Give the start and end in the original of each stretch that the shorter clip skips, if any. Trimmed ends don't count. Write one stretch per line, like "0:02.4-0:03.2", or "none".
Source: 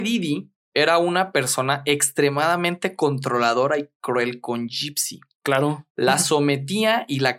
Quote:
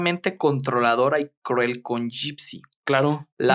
none